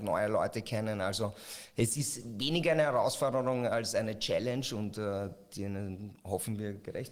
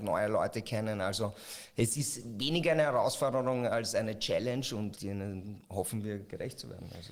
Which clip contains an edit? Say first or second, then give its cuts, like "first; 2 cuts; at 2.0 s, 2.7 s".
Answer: second; 1 cut; at 4.9 s